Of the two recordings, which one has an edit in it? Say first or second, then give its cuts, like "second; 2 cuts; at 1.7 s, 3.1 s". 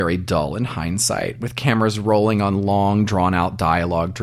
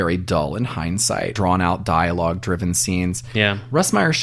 second; 1 cut; at 1.4 s